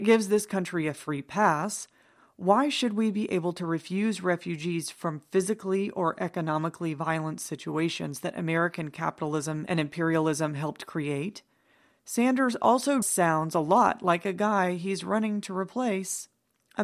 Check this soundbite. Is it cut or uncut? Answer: cut